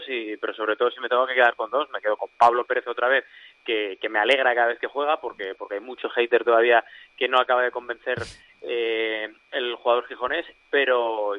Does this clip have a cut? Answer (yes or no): no